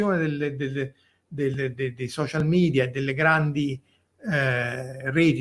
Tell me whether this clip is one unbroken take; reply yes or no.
yes